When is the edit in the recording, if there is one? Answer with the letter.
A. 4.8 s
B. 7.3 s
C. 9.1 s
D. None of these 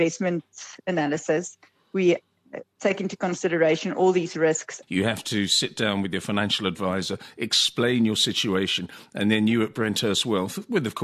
A